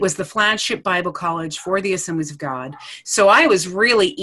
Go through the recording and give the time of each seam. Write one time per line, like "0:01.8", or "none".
none